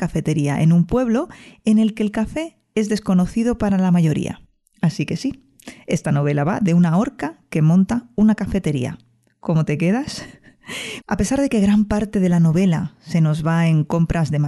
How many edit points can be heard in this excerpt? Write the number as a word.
one